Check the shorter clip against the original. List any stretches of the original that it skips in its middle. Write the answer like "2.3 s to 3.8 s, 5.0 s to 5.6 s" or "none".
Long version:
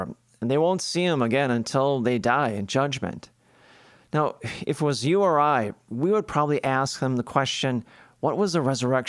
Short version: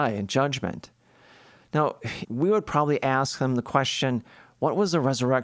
4.6 s to 5.9 s